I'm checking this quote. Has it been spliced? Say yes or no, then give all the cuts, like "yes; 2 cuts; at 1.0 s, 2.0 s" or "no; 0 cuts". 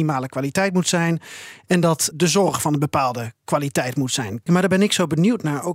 yes; 2 cuts; at 2.1 s, 4.5 s